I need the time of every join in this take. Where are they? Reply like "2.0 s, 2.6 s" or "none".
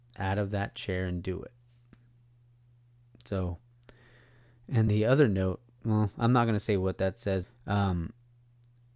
4.9 s, 7.4 s